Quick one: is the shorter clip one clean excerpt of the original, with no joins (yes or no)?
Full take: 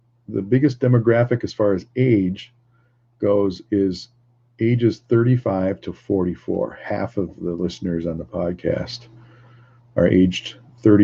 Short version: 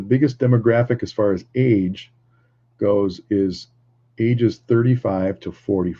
yes